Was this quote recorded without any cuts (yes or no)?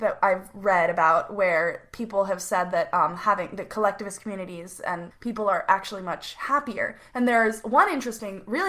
no